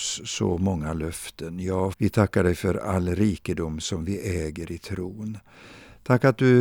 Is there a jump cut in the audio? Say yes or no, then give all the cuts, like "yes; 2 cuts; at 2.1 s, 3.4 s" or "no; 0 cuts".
yes; 1 cut; at 1.9 s